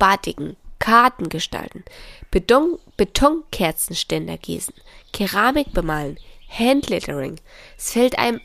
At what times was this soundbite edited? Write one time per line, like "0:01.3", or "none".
none